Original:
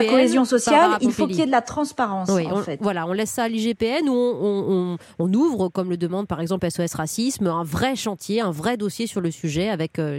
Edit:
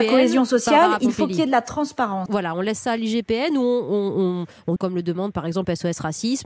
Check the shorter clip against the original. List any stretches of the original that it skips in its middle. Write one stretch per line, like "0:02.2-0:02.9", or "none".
0:02.3-0:02.8
0:05.3-0:05.7